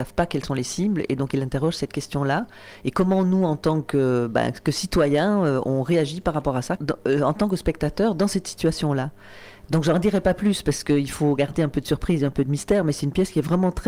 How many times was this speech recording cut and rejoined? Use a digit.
1